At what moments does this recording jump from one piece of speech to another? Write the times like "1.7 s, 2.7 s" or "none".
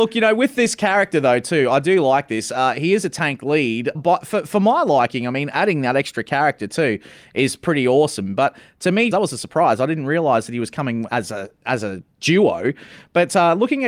3.9 s, 9.1 s, 11.1 s